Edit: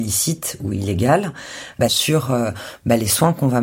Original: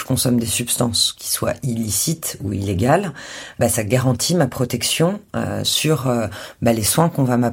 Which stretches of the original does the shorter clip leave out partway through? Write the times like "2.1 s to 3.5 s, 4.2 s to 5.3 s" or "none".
3.7 s to 5.6 s